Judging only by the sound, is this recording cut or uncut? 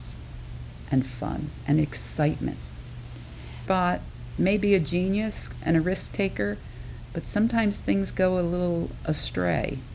cut